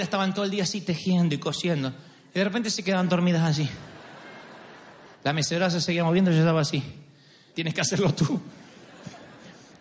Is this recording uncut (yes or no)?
no